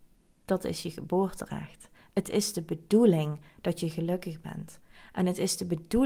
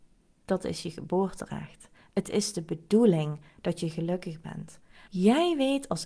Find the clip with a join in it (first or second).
second